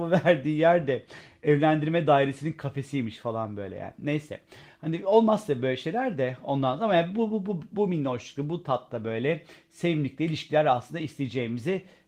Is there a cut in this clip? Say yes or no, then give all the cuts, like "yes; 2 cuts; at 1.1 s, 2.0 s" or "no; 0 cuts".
no; 0 cuts